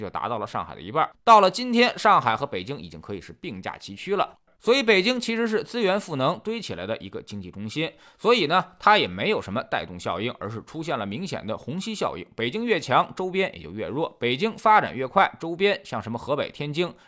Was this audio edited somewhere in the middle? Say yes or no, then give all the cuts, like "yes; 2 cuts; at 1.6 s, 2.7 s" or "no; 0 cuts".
no; 0 cuts